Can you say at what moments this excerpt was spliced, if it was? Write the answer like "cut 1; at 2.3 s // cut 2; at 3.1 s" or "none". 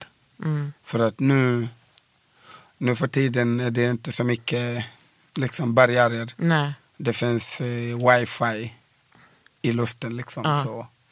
none